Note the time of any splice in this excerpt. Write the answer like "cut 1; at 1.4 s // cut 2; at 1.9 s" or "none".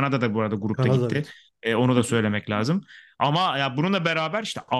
none